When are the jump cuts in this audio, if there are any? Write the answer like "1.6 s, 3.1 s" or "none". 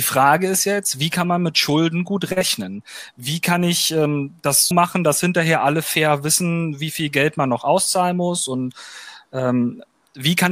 4.7 s